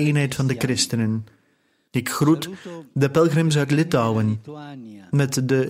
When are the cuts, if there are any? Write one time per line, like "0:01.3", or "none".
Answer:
0:01.9